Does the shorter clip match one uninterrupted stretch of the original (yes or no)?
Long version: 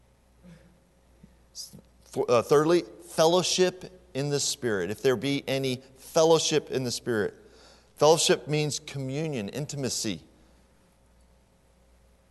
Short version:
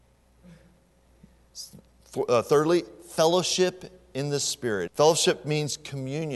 no